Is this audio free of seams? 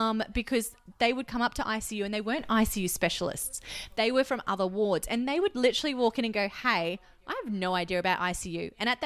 yes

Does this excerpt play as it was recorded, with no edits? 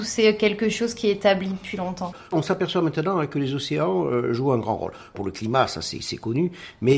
yes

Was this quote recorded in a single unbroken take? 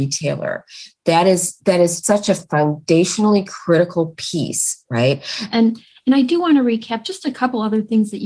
no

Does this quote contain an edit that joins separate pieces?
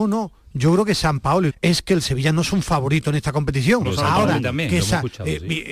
yes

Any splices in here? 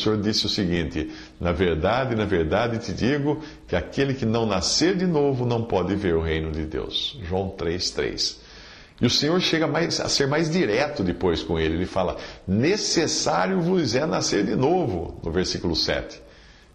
no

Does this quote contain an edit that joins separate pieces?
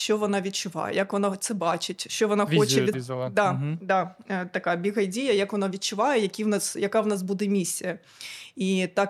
yes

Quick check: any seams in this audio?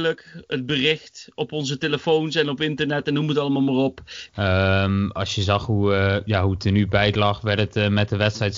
yes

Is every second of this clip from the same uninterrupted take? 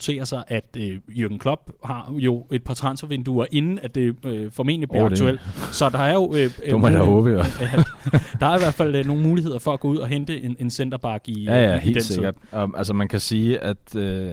yes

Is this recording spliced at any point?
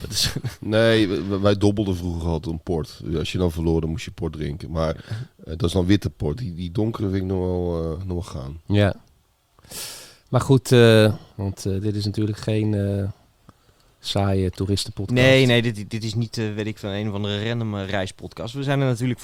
yes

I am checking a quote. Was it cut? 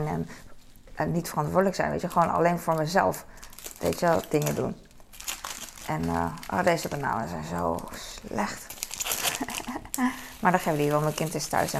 no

